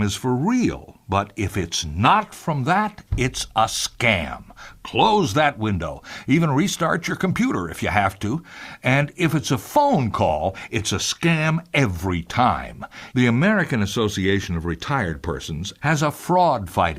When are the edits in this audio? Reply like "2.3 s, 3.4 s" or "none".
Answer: 13.1 s, 15.8 s